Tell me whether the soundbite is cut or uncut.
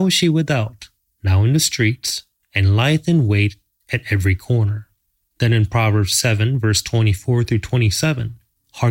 uncut